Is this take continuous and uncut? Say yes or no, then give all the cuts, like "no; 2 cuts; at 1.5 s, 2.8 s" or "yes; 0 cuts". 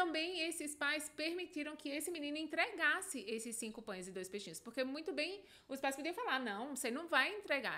yes; 0 cuts